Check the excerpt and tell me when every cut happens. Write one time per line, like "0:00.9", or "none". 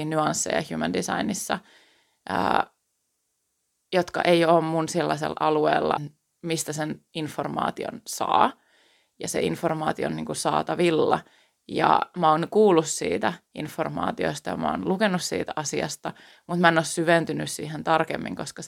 0:06.0